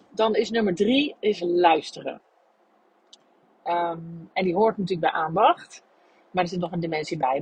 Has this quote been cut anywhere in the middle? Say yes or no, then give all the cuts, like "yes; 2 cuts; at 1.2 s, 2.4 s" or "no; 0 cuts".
no; 0 cuts